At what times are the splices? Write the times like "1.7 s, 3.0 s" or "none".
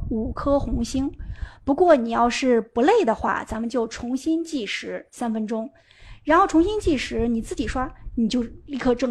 none